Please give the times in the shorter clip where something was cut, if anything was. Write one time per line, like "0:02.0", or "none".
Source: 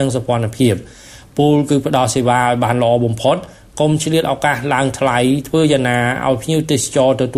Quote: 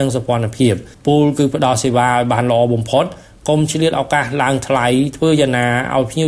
0:00.9